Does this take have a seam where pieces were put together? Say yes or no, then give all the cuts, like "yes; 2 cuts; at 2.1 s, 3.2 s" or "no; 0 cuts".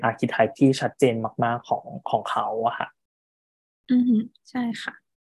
no; 0 cuts